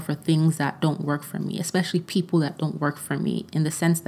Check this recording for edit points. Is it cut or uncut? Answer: uncut